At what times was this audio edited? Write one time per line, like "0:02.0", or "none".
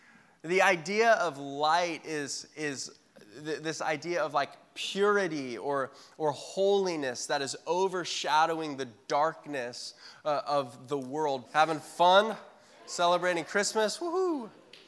0:11.5